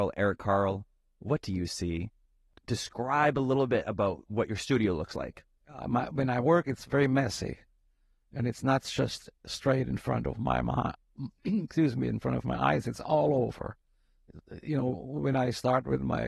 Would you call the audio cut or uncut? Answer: uncut